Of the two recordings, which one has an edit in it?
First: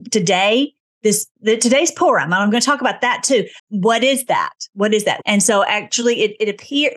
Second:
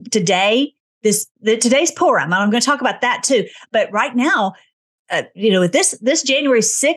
first; 2 cuts; at 3.6 s, 5.2 s

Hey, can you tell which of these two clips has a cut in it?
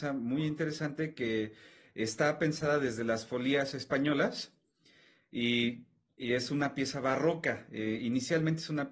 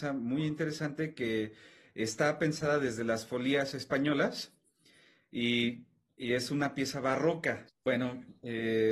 second; 1 cut; at 7.7 s

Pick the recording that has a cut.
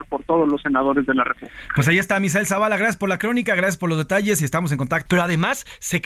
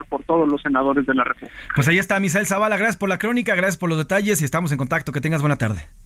first; 1 cut; at 5.1 s

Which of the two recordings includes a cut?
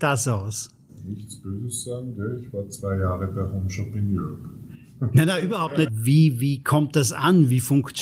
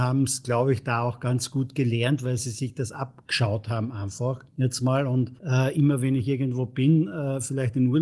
first; 1 cut; at 5.9 s

